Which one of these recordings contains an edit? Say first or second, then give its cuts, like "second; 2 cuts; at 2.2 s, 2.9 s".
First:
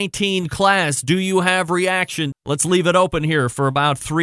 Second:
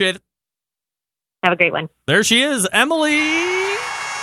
first; 1 cut; at 2.3 s